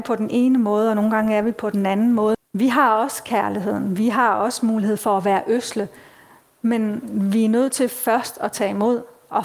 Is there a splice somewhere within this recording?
yes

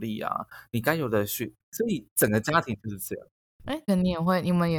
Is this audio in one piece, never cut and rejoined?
no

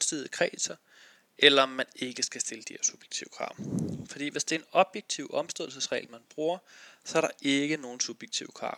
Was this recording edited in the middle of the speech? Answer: no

